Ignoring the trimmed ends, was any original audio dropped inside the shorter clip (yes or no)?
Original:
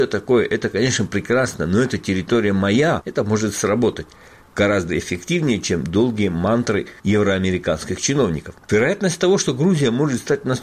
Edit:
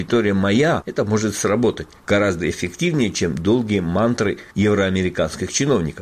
yes